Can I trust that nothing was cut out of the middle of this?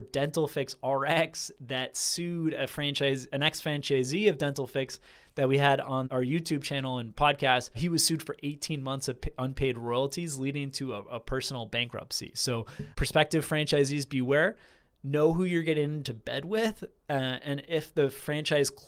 no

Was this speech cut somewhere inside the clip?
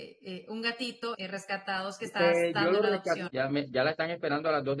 yes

